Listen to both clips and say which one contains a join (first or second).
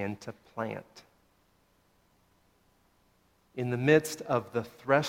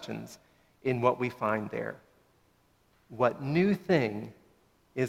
second